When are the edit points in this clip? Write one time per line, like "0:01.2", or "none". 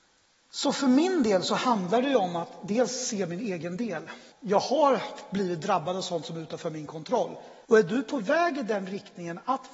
0:04.3
0:07.6